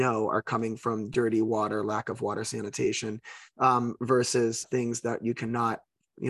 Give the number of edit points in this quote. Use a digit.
1